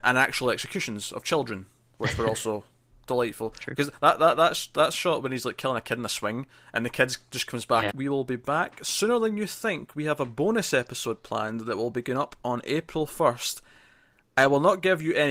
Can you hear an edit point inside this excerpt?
yes; 1 cut; at 7.9 s

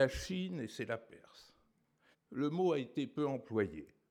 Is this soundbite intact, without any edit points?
no; 1 cut; at 2.1 s

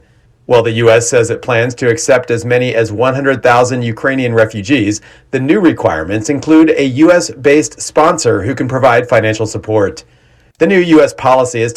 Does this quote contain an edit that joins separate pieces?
yes; 1 cut; at 10.5 s

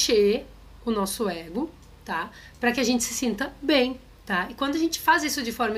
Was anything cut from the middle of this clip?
no; 0 cuts

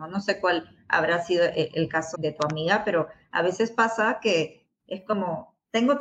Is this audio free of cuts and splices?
no; 1 cut; at 2.1 s

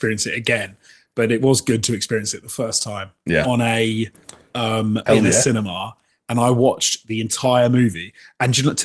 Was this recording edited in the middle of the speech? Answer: yes; 2 cuts; at 3.4 s, 5.1 s

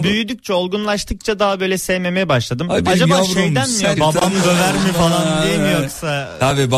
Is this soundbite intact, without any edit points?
no; 1 cut; at 4.0 s

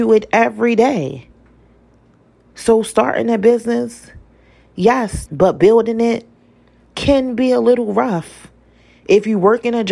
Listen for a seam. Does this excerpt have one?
yes; 1 cut; at 5.3 s

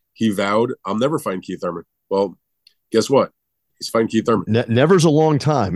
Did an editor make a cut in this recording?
no; 0 cuts

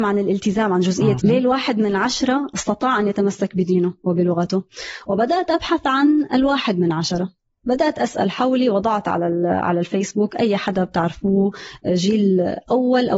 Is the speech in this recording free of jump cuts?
no; 1 cut; at 1.2 s

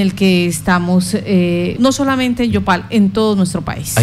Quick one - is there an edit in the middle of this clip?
yes; 1 cut; at 1.8 s

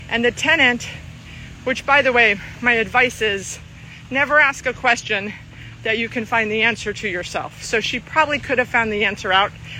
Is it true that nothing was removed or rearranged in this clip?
yes; 0 cuts

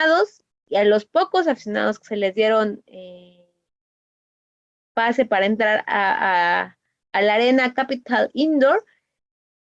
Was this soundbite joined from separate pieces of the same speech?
no; 0 cuts

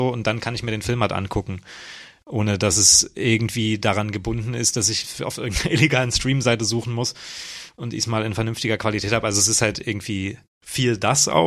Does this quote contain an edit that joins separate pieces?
no; 0 cuts

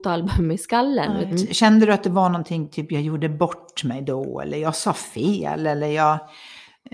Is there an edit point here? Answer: yes; 1 cut; at 1.3 s

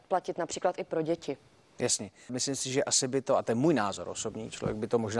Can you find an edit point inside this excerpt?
yes; 1 cut; at 2.3 s

